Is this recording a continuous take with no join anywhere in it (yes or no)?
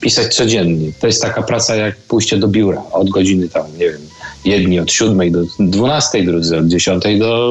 yes